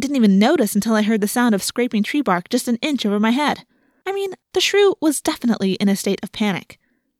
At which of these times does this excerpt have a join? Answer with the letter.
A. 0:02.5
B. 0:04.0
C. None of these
B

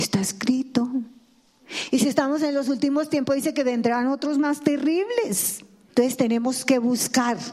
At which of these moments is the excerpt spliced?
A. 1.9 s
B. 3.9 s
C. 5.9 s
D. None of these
C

